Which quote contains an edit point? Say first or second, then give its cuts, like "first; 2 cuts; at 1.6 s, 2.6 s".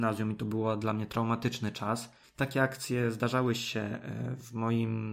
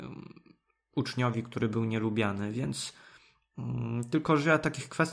first; 1 cut; at 2.2 s